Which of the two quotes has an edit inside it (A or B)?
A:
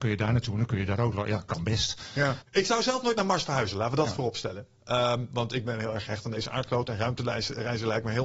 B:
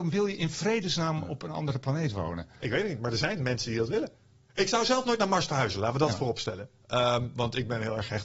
A